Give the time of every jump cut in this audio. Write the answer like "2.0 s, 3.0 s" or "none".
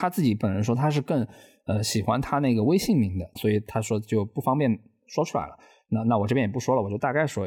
3.3 s

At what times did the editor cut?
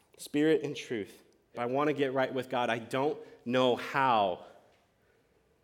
1.5 s

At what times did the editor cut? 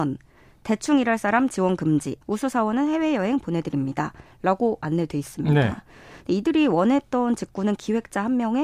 2.2 s

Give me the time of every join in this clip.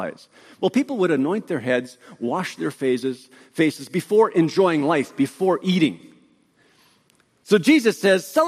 none

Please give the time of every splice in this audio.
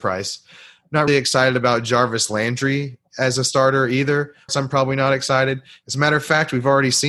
1.1 s, 4.5 s, 5.8 s

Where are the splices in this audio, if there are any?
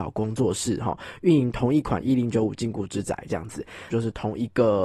3.9 s

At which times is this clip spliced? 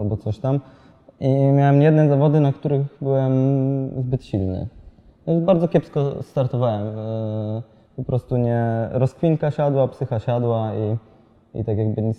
none

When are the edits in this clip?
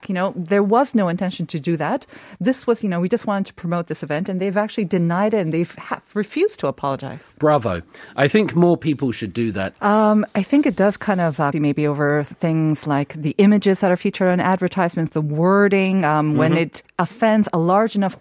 9.7 s, 11.5 s

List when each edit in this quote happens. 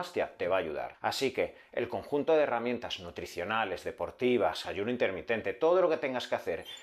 0.9 s, 4.6 s

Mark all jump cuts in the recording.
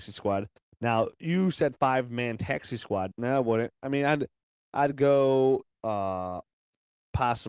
3.1 s, 5.7 s

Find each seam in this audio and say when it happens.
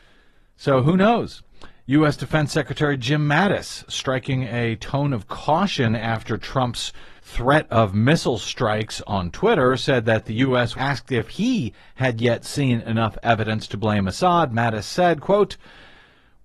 7.2 s, 10.7 s

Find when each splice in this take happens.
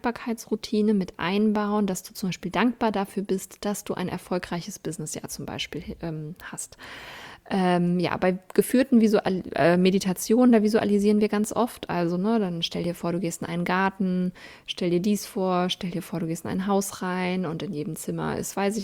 none

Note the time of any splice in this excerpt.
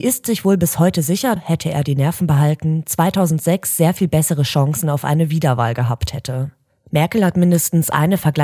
1.4 s

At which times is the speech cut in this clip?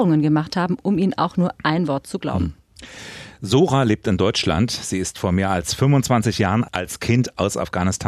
none

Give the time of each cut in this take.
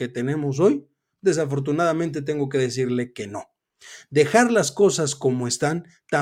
none

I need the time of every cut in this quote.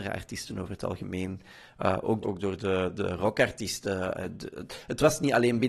2.2 s

